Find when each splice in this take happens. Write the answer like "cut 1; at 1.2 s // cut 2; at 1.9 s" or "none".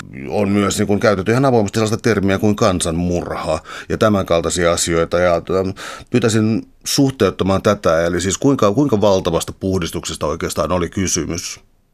none